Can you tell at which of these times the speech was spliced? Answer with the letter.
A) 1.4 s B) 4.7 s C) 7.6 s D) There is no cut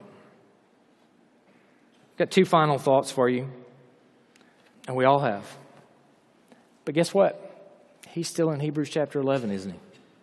B